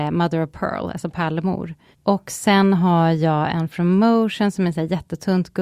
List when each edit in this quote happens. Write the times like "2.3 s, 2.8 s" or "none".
1.9 s